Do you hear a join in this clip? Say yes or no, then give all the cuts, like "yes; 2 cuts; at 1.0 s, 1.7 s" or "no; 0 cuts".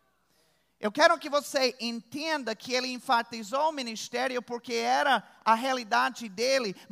no; 0 cuts